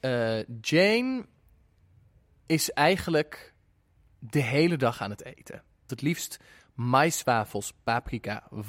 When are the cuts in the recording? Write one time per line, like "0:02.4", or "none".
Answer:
0:05.9